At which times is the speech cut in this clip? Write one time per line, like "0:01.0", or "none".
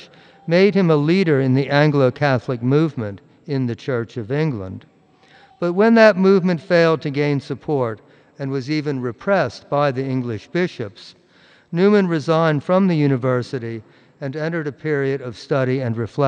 none